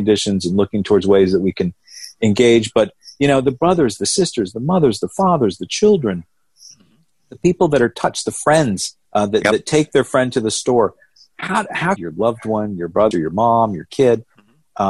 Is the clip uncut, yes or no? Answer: no